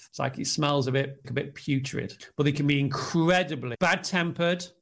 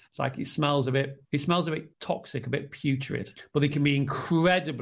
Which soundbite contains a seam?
first; 1 cut; at 1.2 s

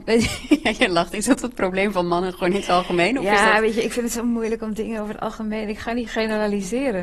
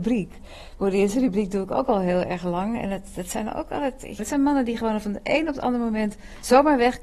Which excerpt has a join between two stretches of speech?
second; 1 cut; at 4.2 s

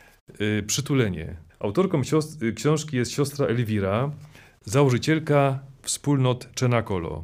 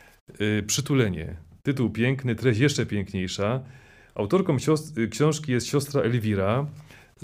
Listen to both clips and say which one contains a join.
first; 1 cut; at 1.5 s

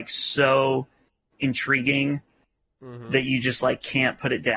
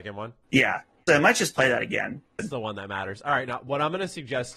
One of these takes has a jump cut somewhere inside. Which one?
second; 2 cuts; at 1.1 s, 2.4 s

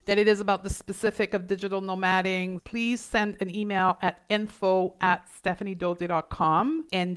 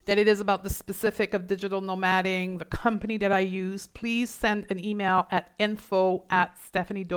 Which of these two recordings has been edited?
first; 1 cut; at 2.6 s

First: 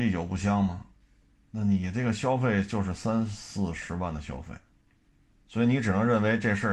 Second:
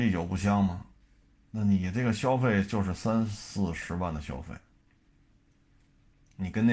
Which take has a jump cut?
first; 1 cut; at 5.4 s

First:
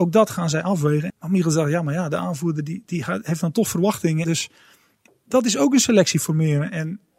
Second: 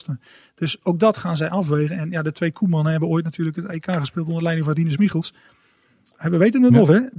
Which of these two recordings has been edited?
first; 2 cuts; at 1.1 s, 4.2 s

